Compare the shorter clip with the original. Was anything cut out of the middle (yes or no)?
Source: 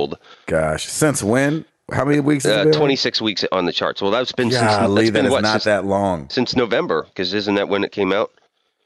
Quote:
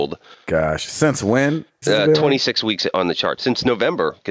yes